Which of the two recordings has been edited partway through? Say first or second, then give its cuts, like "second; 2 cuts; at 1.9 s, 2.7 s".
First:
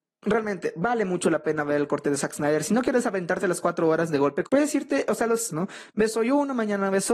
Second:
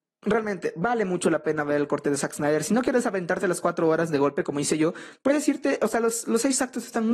first; 2 cuts; at 4.5 s, 5.5 s